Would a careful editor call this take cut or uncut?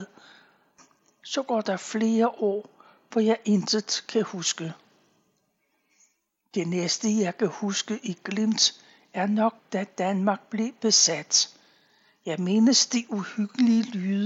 uncut